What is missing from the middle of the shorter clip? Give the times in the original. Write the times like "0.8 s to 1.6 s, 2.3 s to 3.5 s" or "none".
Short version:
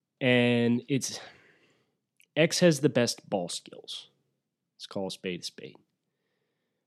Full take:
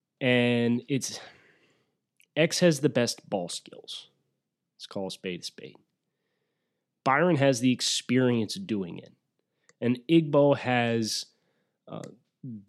none